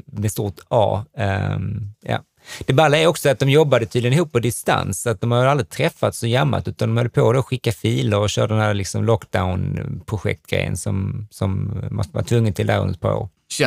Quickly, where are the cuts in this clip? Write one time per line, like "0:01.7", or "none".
none